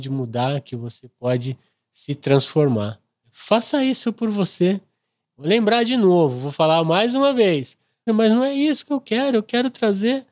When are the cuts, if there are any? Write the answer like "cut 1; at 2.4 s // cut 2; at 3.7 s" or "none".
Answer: cut 1; at 5.2 s // cut 2; at 8.1 s

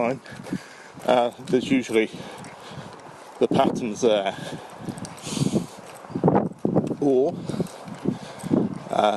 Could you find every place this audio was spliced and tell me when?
cut 1; at 1.0 s

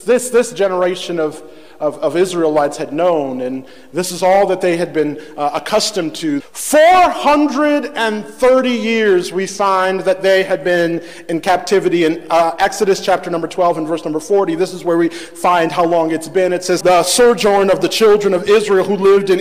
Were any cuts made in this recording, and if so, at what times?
cut 1; at 6.4 s // cut 2; at 16.8 s

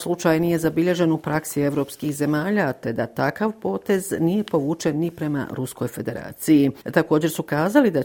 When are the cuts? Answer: none

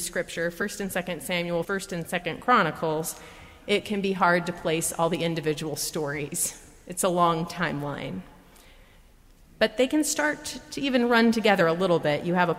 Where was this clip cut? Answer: cut 1; at 1.6 s

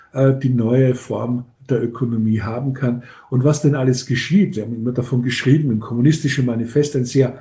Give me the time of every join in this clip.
none

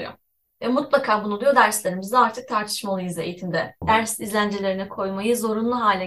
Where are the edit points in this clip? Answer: cut 1; at 3.8 s

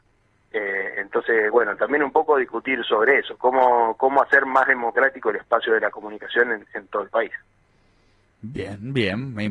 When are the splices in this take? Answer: none

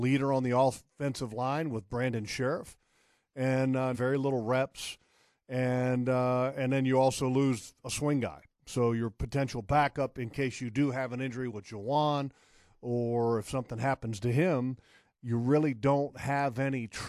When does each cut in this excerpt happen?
cut 1; at 3.9 s

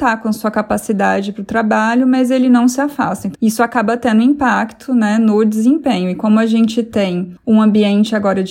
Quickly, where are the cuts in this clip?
none

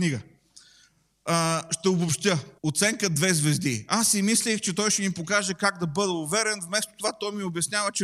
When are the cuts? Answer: cut 1; at 2.6 s

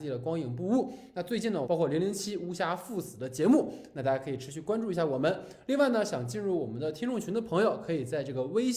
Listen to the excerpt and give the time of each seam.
cut 1; at 1.6 s

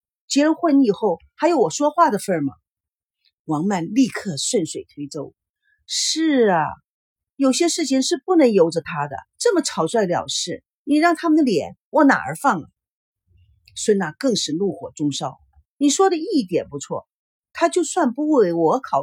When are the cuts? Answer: cut 1; at 9.2 s

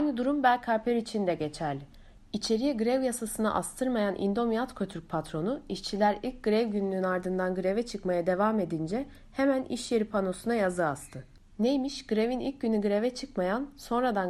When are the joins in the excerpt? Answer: none

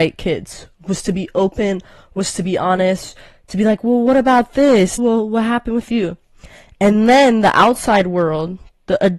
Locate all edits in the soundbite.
cut 1; at 5.0 s

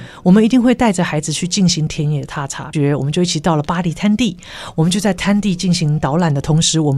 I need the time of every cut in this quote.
cut 1; at 2.7 s

